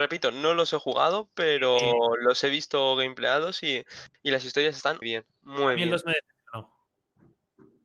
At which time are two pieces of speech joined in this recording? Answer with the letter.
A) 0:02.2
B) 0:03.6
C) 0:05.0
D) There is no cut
C